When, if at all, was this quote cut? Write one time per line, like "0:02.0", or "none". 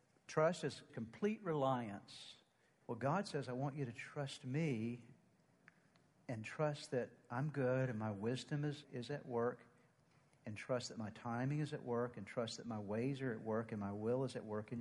0:02.7
0:08.8

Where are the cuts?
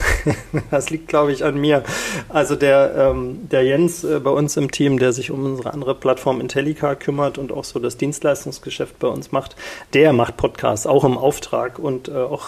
none

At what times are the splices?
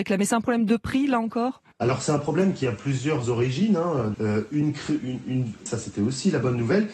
0:01.7
0:04.1
0:05.7

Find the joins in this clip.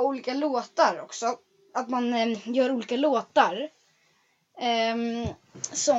none

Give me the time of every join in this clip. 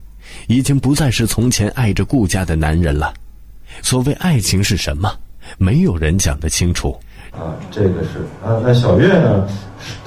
0:03.8
0:07.3

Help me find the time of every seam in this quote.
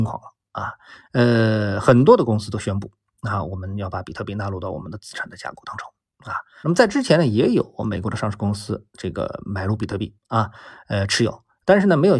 0:06.6

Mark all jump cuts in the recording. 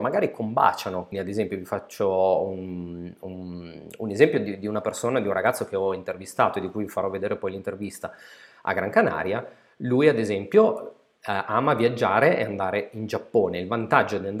0:01.1

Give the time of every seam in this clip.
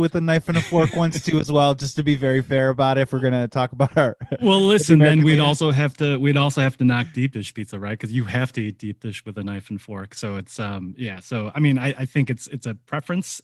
none

